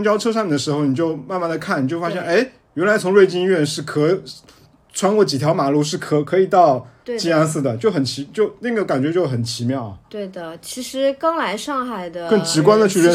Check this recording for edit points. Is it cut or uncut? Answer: uncut